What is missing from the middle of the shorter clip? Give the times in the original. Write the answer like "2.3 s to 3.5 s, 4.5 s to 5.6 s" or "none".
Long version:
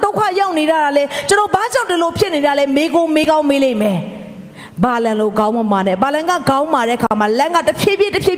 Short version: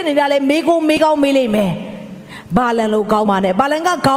5.5 s to 5.7 s